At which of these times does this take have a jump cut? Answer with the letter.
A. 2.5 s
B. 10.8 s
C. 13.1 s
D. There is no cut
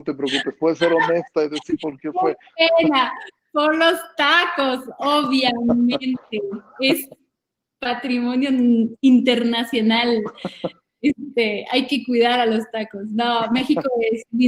D